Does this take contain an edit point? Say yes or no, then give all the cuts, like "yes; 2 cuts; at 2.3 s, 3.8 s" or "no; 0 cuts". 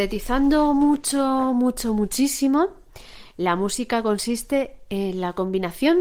no; 0 cuts